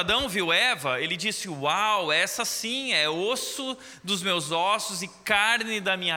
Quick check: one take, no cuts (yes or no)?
yes